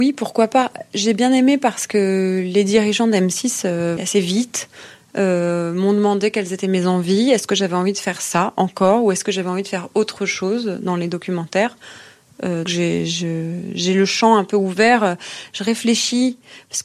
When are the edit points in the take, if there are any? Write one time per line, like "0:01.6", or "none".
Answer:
0:04.0
0:12.7